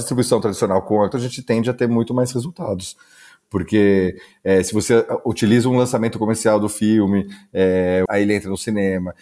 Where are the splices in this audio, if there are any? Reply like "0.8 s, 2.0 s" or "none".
1.1 s, 8.1 s